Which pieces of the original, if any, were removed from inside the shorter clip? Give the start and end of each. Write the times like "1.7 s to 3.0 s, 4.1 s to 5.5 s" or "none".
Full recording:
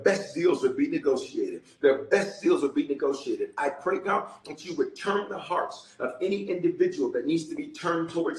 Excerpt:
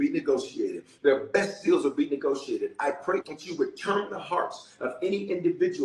4.0 s to 4.4 s